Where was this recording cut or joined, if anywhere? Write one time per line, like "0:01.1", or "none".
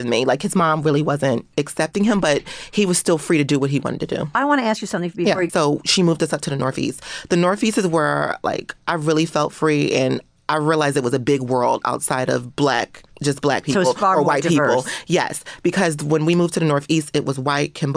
0:05.5